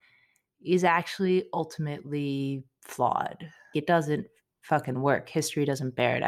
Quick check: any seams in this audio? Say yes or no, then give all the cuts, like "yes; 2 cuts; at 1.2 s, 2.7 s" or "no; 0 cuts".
yes; 1 cut; at 3.7 s